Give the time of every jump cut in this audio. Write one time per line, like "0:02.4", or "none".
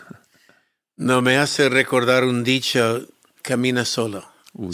0:03.4